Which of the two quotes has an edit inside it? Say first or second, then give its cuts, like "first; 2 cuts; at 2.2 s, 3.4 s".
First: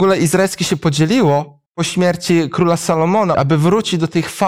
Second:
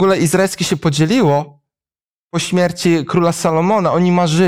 first; 2 cuts; at 1.7 s, 3.3 s